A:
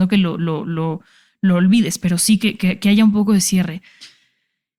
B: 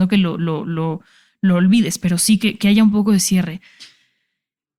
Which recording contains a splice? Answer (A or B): B